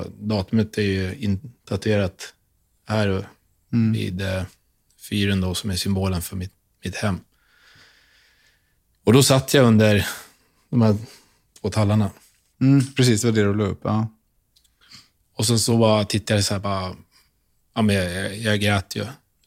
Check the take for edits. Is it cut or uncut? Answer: uncut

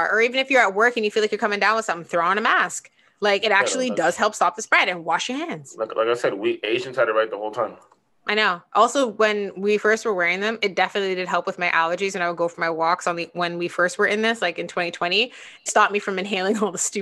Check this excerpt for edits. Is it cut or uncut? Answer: cut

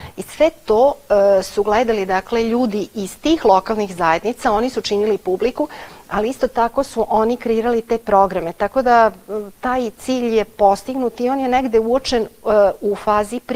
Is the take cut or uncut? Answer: uncut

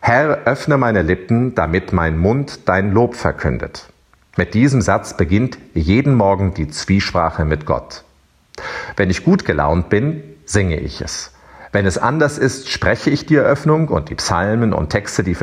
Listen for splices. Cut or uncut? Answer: uncut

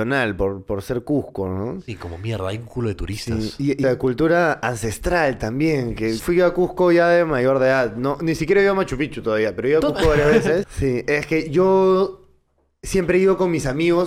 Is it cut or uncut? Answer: cut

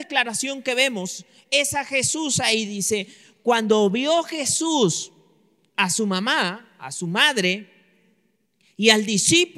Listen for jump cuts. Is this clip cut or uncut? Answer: uncut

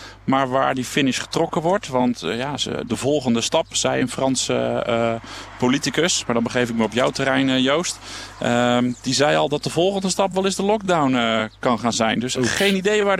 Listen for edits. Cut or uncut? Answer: cut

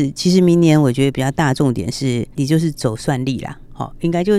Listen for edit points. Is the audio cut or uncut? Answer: uncut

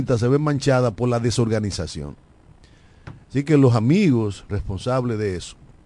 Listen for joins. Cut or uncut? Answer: cut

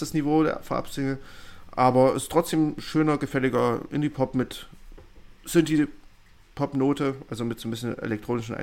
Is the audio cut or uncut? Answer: uncut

